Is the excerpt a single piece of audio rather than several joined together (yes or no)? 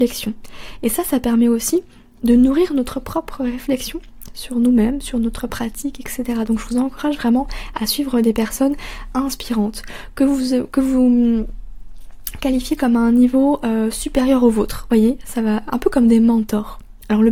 yes